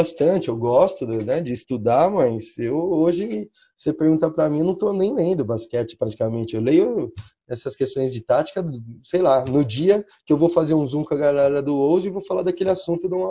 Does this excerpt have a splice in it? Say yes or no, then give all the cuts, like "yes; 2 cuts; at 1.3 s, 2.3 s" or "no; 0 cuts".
no; 0 cuts